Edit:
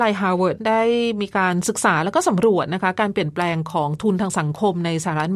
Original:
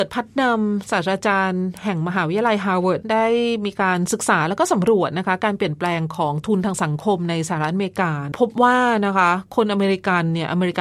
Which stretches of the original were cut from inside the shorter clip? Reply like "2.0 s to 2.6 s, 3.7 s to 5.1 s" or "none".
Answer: none